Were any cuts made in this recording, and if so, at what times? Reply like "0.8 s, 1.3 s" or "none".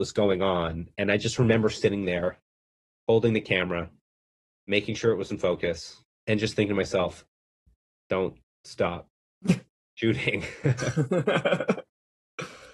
6.1 s